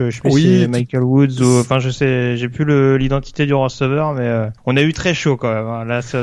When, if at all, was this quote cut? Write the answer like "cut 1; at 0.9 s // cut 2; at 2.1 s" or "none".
cut 1; at 4.6 s